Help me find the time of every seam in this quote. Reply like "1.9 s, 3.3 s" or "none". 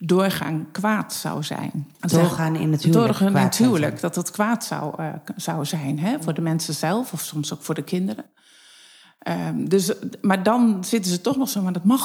1.9 s

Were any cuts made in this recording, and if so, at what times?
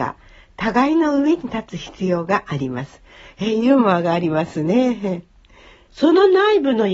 5.9 s

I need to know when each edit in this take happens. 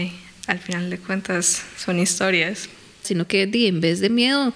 3.0 s

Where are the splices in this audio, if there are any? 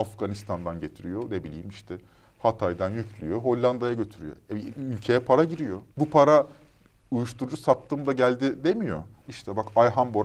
5.9 s, 9.1 s

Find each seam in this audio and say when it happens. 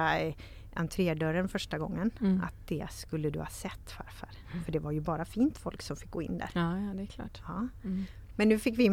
none

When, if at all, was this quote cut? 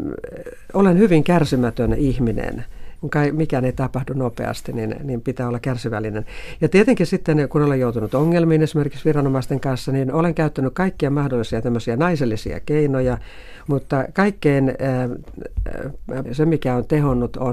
3.0 s, 13.7 s, 16.3 s

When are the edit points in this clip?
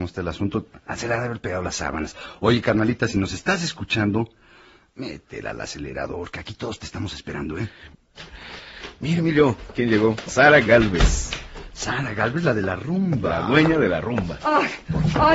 none

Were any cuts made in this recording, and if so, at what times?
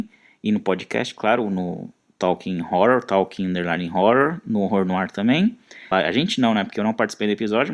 5.9 s

